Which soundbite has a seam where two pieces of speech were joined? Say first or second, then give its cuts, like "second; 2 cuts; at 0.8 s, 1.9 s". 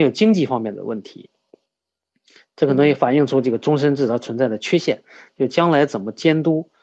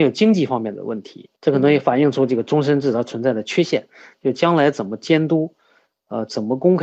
second; 1 cut; at 1.4 s